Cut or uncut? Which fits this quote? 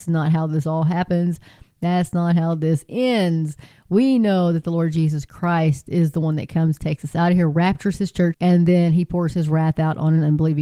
cut